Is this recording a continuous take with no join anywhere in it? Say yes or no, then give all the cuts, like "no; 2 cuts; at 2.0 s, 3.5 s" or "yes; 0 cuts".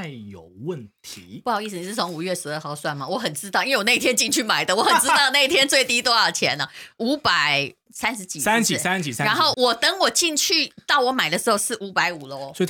no; 2 cuts; at 7.9 s, 9.5 s